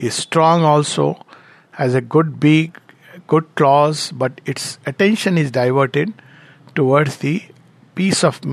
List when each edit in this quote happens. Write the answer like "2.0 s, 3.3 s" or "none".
none